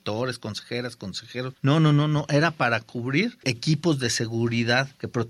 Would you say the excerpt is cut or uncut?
uncut